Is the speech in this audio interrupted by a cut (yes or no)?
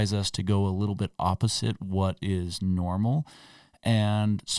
no